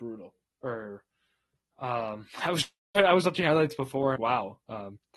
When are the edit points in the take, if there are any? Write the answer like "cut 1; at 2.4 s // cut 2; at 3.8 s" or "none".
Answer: cut 1; at 4.2 s

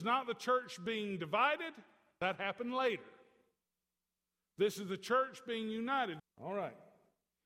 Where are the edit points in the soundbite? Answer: cut 1; at 6.2 s

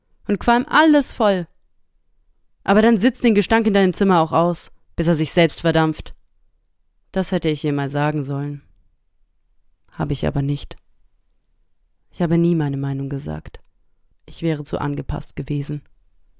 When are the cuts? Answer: cut 1; at 14.1 s

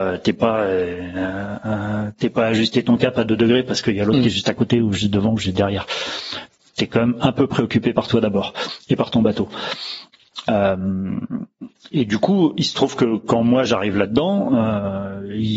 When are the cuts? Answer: none

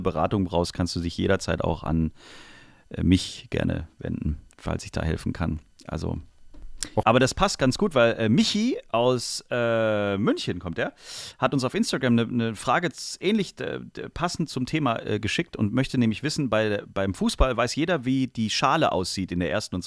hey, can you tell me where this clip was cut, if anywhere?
cut 1; at 7.0 s

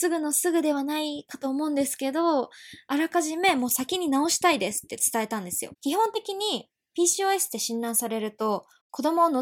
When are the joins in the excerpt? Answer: cut 1; at 5.7 s

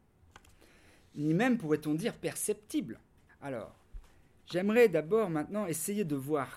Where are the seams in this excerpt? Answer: cut 1; at 3.3 s

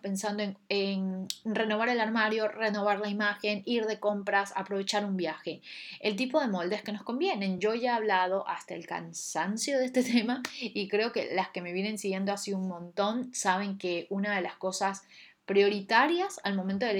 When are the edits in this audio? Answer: none

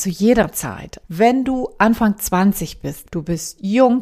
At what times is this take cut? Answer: cut 1; at 1.0 s // cut 2; at 3.0 s

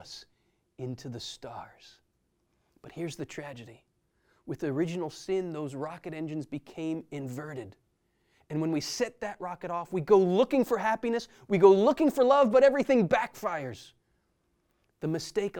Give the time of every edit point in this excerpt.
none

